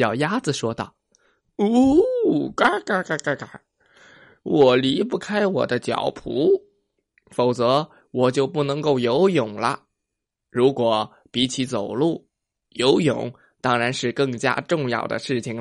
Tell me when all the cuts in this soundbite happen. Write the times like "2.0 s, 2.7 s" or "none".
none